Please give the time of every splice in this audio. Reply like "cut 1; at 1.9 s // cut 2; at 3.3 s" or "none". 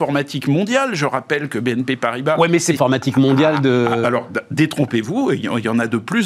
cut 1; at 2.8 s